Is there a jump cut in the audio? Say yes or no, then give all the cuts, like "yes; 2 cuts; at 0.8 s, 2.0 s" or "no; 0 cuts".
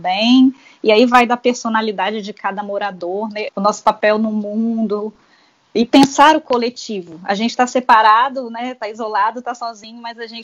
yes; 1 cut; at 3.5 s